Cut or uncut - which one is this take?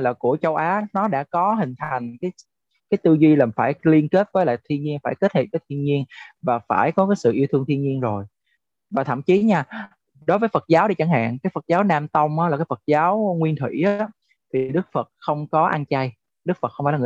uncut